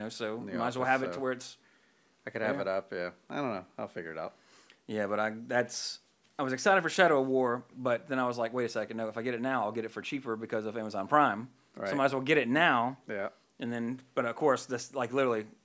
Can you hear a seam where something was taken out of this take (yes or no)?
yes